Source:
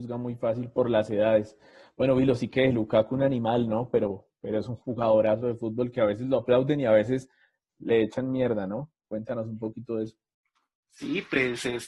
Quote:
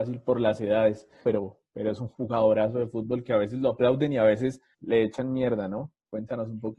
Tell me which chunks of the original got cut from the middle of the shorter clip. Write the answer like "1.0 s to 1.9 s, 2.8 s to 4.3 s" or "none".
1.7 s to 3.9 s, 7.4 s to 7.7 s